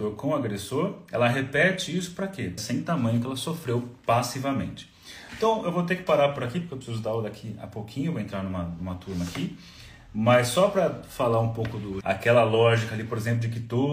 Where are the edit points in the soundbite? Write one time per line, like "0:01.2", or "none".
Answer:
0:02.6
0:12.0